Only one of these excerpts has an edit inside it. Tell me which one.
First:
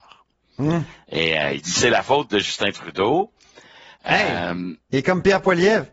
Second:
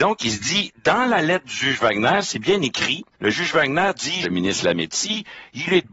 second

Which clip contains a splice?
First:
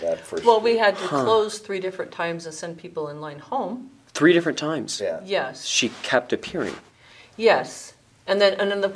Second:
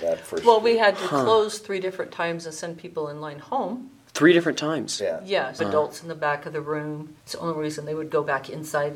second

